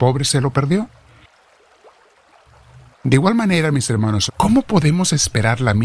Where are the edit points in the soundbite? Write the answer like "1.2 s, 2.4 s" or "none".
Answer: 2.9 s, 4.3 s